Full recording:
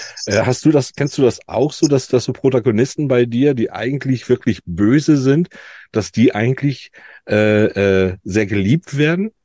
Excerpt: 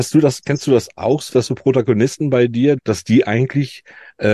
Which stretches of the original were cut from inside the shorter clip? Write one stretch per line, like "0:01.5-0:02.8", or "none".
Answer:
0:01.8-0:02.1
0:03.6-0:05.8